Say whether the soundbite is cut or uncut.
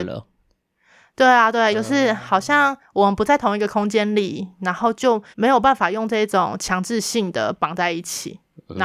cut